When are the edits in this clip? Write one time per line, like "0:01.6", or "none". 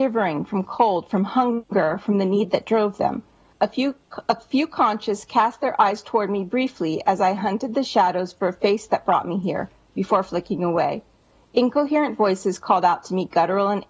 0:03.5